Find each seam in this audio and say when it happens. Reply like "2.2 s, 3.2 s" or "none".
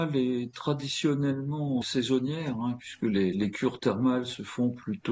1.8 s

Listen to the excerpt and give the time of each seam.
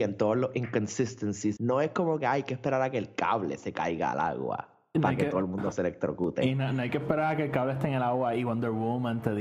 1.6 s

